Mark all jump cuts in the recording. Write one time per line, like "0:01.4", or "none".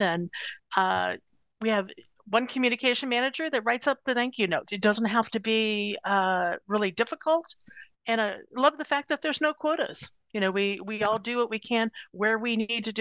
0:04.6